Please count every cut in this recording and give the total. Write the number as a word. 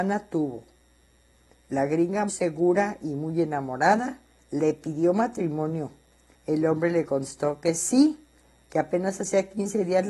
two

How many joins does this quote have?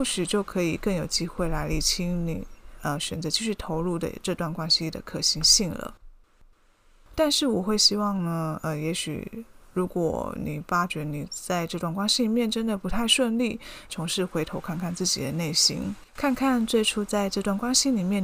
three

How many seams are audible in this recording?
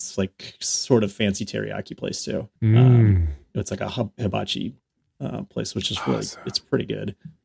one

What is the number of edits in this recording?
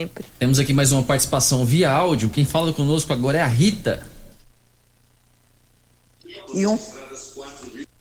one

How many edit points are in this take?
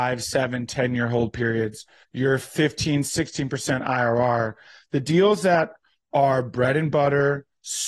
one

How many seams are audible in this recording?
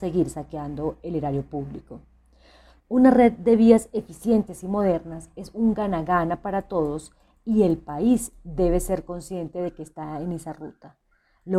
one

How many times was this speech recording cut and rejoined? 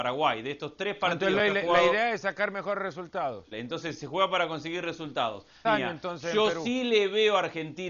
two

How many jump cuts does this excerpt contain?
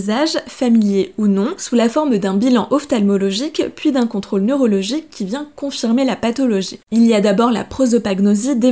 one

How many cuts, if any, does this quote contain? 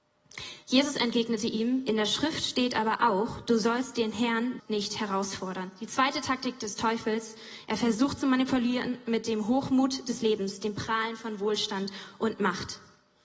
one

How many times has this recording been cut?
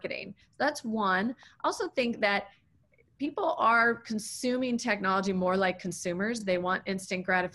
zero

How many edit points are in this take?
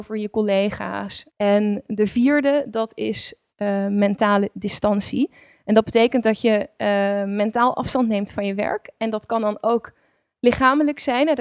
one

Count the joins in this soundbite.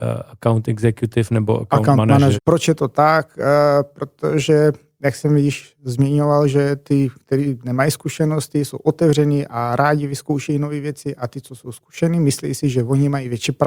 one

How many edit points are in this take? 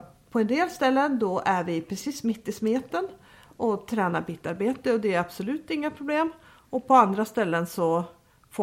zero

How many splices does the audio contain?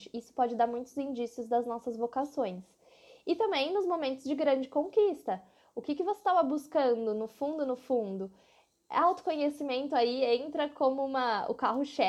zero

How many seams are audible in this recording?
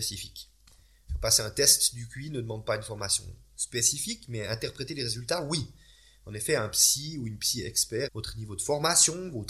one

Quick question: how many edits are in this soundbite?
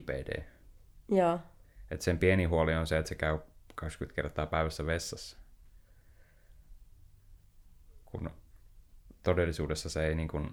zero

